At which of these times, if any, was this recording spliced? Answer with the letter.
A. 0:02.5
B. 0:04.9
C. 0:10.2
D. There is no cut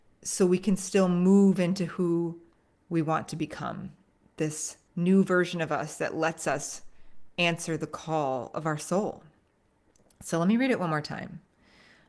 B